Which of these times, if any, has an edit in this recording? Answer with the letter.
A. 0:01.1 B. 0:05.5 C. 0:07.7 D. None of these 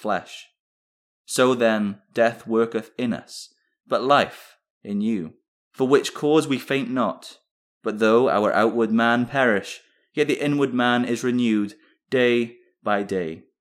B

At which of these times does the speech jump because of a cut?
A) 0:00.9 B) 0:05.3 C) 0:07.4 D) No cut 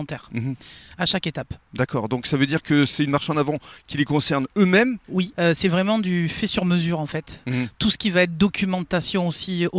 B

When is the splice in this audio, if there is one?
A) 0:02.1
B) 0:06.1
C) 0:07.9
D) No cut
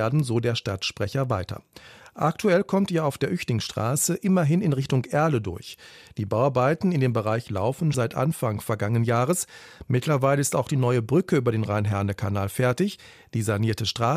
C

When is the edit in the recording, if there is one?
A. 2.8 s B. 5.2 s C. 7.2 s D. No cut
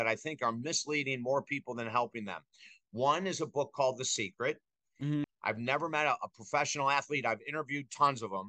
B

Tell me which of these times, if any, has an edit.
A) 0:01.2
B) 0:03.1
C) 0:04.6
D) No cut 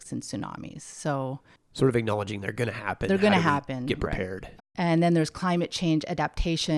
C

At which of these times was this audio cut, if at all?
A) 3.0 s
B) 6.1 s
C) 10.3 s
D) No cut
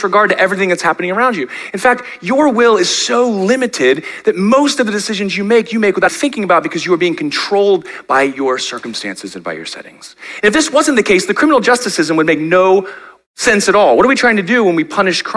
B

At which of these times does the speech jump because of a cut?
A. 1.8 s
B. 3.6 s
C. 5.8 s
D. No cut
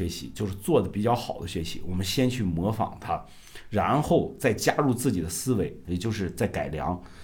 C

